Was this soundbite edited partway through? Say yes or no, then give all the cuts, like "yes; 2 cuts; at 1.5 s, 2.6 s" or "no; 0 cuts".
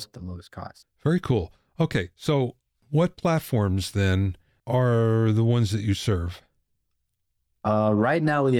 no; 0 cuts